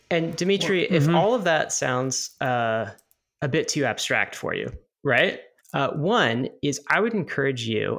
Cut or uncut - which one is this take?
cut